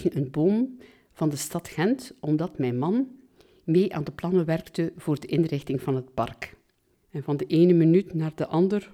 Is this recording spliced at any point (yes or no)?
yes